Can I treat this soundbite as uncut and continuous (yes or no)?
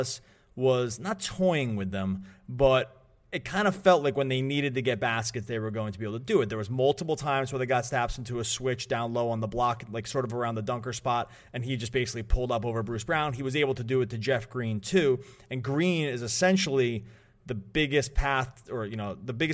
yes